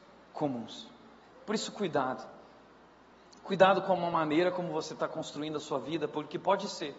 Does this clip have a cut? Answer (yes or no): yes